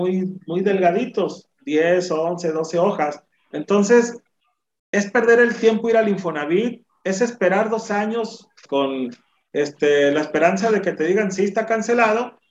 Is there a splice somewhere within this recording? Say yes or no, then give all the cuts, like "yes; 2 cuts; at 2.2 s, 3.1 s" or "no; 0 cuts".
yes; 2 cuts; at 3.5 s, 8.6 s